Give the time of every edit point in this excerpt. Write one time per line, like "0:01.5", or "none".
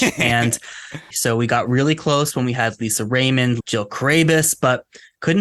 0:01.1
0:03.6